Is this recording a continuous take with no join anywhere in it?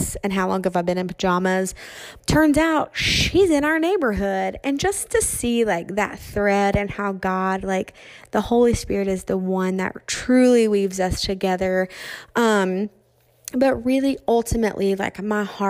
no; 1 cut; at 2.2 s

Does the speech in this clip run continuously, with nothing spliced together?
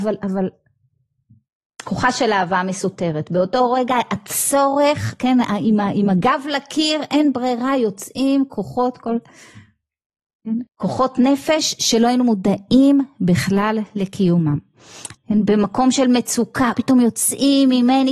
no; 3 cuts; at 10.7 s, 15.1 s, 16.7 s

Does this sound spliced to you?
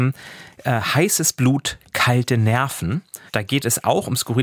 yes; 1 cut; at 3.3 s

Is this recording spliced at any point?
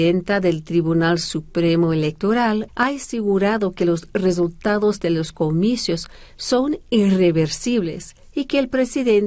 yes; 1 cut; at 2.7 s

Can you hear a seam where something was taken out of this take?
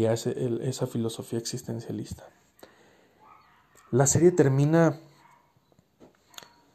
no; 0 cuts

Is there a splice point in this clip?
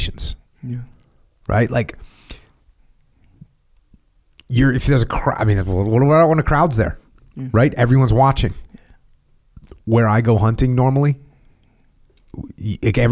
no; 0 cuts

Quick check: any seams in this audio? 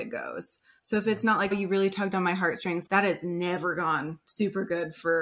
yes; 2 cuts; at 1.5 s, 2.9 s

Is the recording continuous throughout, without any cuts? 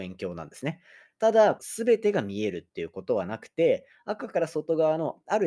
no; 1 cut; at 1.6 s

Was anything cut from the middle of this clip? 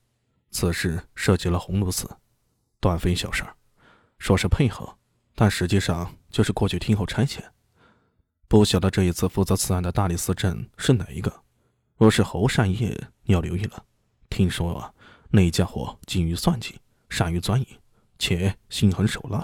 no; 0 cuts

